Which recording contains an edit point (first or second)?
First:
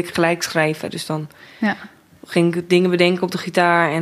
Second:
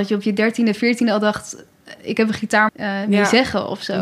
second